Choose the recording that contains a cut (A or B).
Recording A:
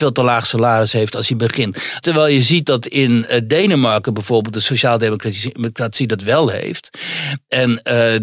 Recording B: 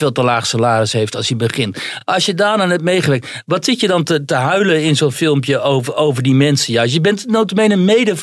A